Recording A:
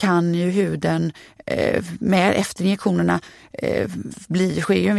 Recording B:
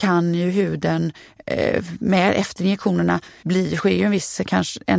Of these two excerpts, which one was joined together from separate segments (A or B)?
B